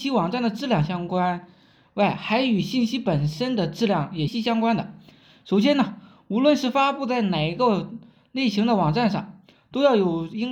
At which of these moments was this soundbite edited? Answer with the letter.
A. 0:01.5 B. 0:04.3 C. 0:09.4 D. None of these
B